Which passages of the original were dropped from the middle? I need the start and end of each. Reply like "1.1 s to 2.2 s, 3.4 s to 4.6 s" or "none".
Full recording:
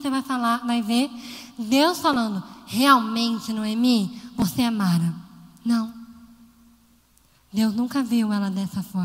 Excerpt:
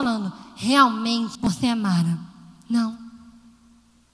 3.5 s to 4.3 s